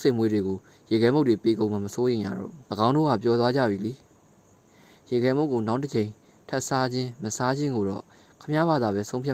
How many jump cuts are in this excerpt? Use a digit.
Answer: 1